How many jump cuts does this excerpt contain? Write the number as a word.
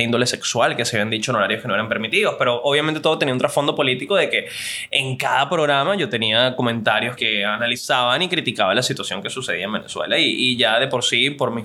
one